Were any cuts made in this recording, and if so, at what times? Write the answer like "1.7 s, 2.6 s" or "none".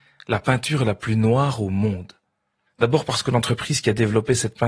2.7 s